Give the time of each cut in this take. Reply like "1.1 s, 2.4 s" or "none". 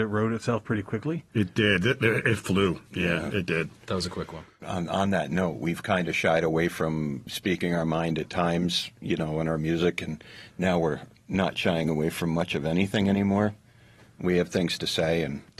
none